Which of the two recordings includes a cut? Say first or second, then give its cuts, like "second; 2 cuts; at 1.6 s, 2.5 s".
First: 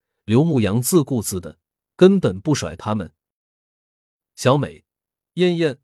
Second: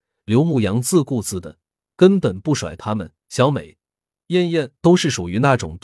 second; 1 cut; at 3.2 s